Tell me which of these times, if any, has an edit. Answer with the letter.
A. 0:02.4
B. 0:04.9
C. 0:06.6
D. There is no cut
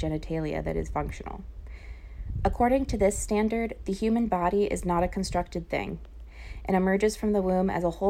D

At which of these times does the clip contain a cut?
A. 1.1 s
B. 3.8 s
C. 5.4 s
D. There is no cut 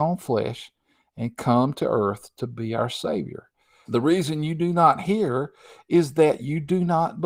B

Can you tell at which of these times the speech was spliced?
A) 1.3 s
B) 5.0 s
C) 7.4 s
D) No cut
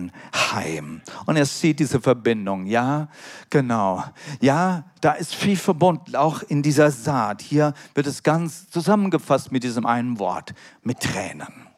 B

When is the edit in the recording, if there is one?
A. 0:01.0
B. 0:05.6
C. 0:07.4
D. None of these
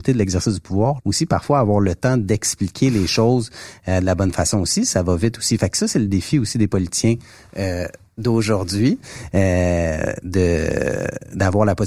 A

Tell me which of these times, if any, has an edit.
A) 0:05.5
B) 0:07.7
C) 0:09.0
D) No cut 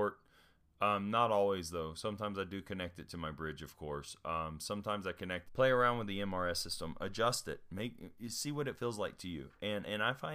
A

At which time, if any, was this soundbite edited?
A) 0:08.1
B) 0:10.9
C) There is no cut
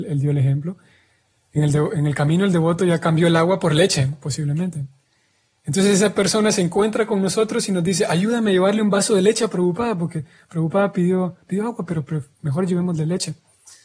C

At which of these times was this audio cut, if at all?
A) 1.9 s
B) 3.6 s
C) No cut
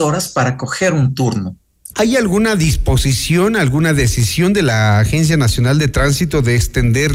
A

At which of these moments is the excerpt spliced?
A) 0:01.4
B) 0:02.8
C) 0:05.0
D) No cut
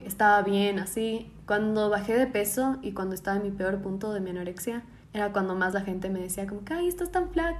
C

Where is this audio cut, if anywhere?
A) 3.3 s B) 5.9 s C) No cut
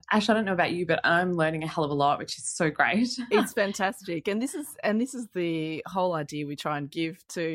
C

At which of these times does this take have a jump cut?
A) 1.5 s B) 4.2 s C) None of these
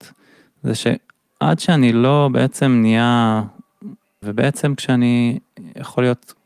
B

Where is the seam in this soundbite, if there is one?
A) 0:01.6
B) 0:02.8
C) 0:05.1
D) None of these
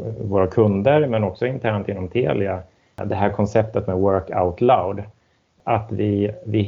D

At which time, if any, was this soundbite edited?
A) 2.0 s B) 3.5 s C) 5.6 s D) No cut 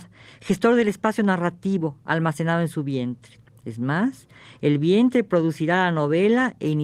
D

